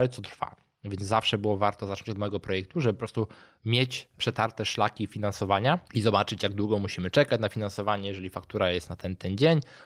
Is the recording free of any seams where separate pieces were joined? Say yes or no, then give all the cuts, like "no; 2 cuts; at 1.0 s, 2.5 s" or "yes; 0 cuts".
no; 1 cut; at 5.9 s